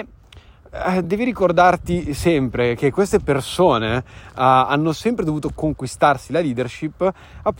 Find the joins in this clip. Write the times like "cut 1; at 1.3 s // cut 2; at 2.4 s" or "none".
none